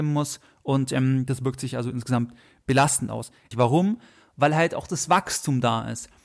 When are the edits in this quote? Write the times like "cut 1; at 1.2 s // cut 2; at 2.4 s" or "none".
cut 1; at 3.5 s